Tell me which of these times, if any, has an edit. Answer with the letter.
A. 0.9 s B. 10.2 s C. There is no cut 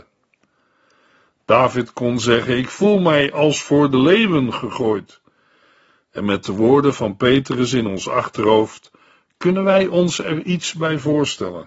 C